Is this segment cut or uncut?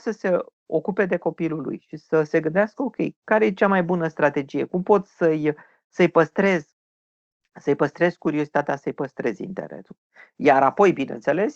uncut